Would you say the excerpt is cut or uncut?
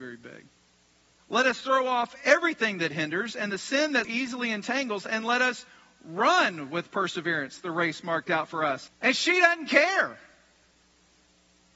cut